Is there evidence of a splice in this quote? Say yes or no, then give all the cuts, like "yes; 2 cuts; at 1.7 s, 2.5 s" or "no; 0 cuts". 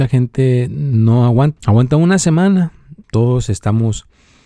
yes; 2 cuts; at 1.6 s, 3.0 s